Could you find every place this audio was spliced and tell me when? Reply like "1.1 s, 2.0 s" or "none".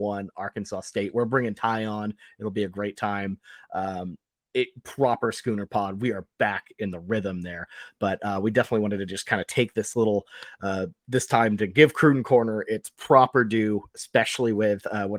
none